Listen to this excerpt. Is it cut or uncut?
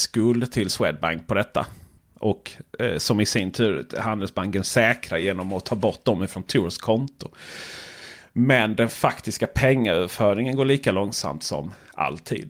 uncut